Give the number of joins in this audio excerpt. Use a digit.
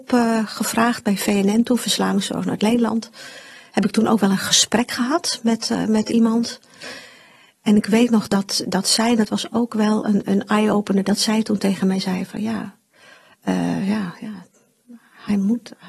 0